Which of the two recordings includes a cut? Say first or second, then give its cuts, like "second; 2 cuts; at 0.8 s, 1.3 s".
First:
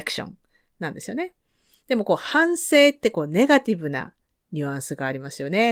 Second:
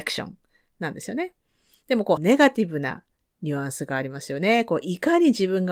second; 1 cut; at 2.2 s